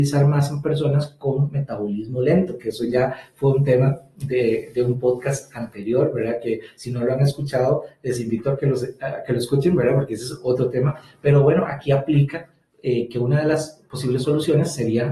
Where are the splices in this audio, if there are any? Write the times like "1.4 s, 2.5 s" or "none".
none